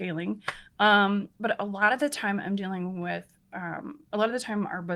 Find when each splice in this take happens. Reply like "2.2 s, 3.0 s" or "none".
none

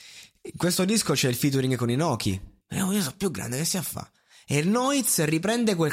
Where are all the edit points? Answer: 2.6 s

